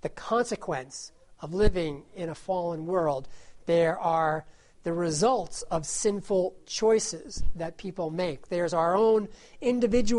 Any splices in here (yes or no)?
no